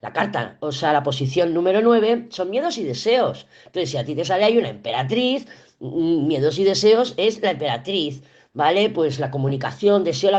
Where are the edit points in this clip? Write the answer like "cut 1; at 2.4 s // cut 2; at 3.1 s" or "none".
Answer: none